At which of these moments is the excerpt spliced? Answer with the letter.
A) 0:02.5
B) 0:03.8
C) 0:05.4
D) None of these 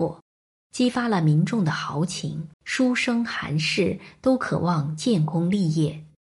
A